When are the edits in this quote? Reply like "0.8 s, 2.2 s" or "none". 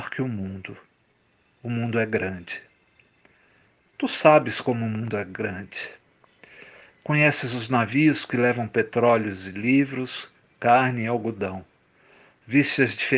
none